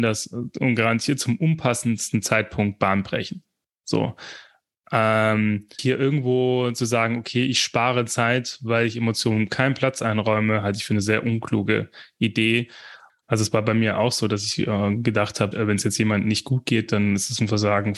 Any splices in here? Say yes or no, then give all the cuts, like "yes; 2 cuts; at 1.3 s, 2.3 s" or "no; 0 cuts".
yes; 3 cuts; at 5.8 s, 13.1 s, 15.5 s